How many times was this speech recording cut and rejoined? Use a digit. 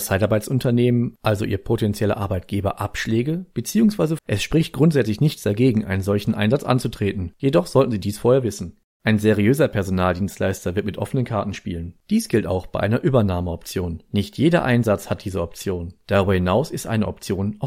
2